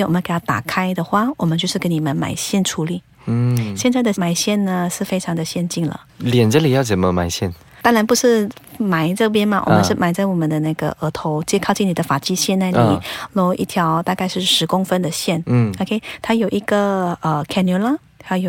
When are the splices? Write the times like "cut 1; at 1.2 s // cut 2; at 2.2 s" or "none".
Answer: cut 1; at 6.1 s

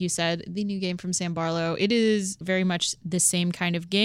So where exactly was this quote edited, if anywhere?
cut 1; at 2.4 s

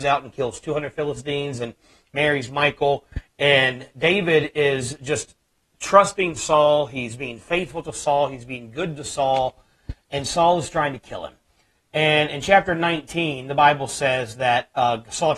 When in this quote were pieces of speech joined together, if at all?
none

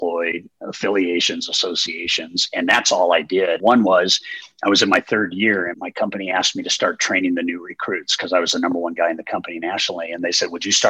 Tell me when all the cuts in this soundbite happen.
cut 1; at 3.6 s // cut 2; at 5.7 s

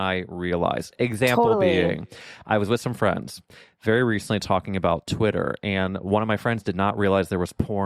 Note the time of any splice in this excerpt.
none

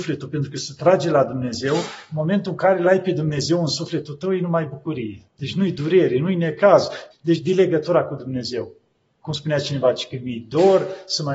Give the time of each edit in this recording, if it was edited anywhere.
cut 1; at 5.3 s // cut 2; at 7.1 s

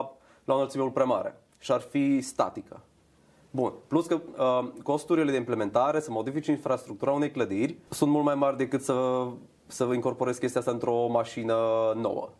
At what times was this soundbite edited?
none

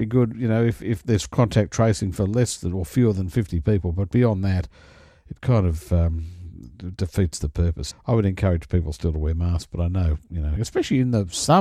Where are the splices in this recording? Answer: cut 1; at 7.9 s // cut 2; at 10.6 s

